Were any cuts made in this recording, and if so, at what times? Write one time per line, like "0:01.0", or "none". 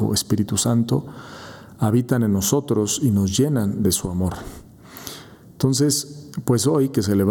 none